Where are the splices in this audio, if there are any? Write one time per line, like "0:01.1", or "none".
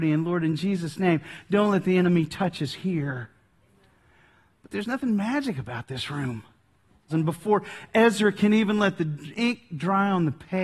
0:07.1